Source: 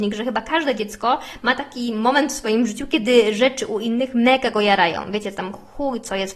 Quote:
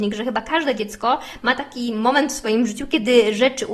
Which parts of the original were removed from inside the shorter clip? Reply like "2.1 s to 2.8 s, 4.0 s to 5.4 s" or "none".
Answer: none